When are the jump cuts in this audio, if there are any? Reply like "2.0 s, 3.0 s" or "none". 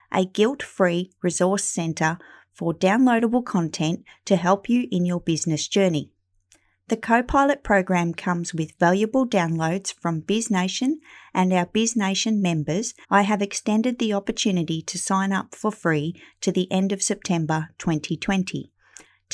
13.0 s